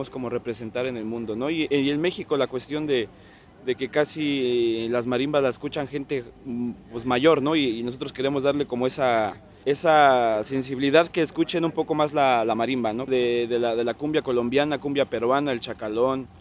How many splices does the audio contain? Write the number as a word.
two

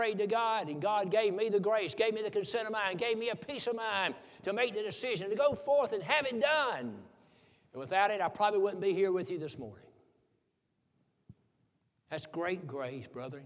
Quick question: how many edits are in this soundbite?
zero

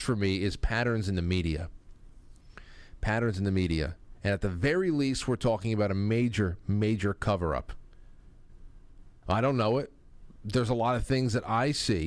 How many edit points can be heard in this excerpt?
one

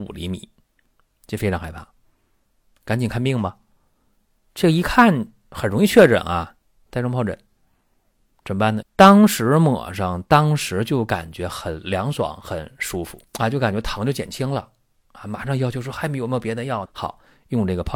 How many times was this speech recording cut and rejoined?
three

